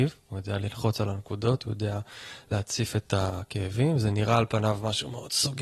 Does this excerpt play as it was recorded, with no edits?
yes; 0 cuts

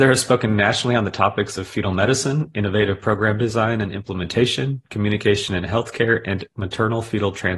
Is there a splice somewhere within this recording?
no; 0 cuts

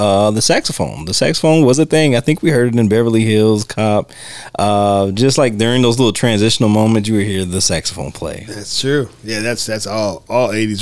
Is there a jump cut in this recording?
no; 0 cuts

